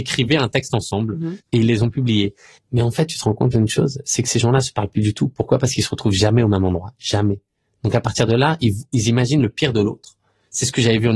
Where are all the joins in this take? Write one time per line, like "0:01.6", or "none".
0:01.4